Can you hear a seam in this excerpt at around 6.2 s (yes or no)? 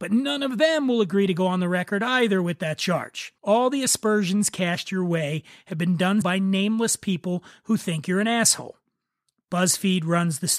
yes